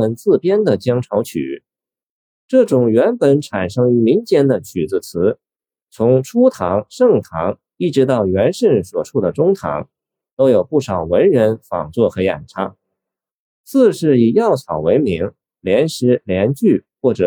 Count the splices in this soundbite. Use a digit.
0